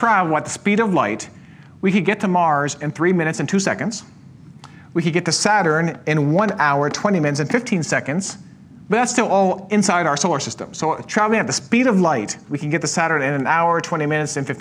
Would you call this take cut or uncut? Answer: uncut